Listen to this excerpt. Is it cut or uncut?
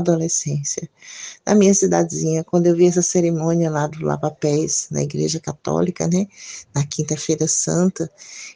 uncut